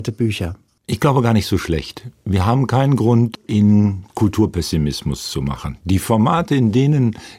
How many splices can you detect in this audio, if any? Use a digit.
0